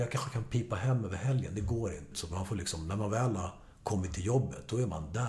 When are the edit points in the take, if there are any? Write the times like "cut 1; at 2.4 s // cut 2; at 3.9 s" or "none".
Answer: cut 1; at 2.1 s